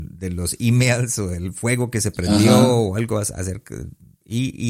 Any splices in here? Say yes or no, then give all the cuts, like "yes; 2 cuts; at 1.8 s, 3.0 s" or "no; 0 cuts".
no; 0 cuts